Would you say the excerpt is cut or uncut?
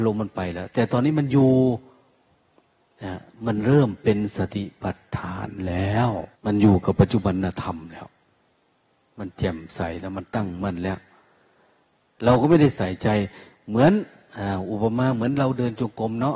cut